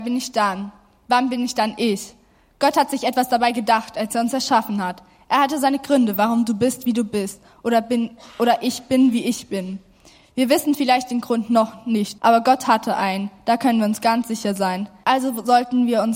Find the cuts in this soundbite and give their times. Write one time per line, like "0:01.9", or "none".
0:12.2
0:15.0